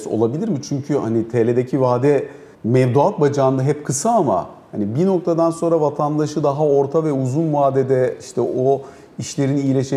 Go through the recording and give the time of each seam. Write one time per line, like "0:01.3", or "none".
0:02.5